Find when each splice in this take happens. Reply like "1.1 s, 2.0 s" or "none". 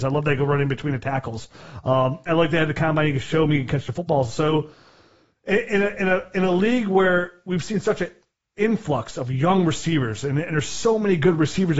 2.3 s